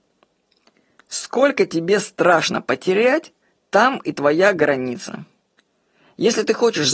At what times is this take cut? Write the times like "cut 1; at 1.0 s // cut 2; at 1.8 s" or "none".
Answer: cut 1; at 1.0 s